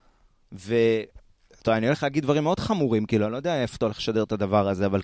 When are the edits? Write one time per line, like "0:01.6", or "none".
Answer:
none